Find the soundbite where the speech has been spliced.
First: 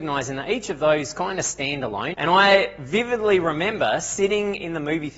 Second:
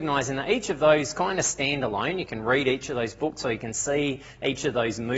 first; 1 cut; at 2.1 s

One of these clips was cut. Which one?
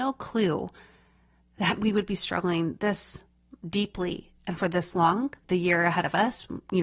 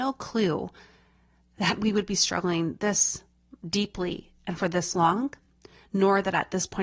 first; 1 cut; at 5.4 s

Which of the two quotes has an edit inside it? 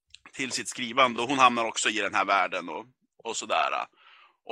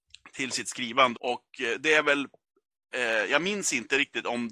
second; 1 cut; at 1.1 s

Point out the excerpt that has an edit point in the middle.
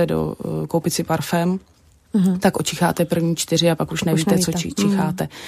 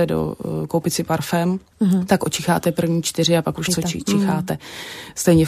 second; 2 cuts; at 1.7 s, 3.7 s

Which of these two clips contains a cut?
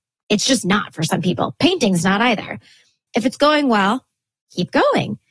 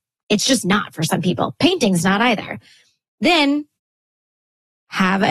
first; 1 cut; at 3.1 s

